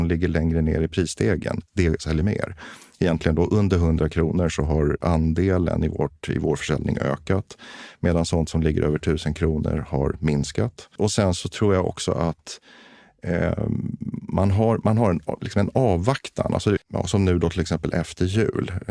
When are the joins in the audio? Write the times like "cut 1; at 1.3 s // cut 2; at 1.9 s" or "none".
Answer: cut 1; at 16.8 s